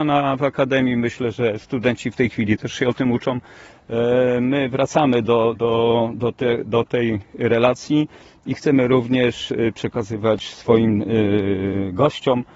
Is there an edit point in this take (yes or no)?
yes